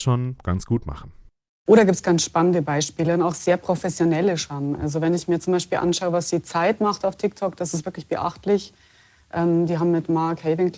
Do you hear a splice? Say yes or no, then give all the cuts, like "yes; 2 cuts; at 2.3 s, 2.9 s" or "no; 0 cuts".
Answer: no; 0 cuts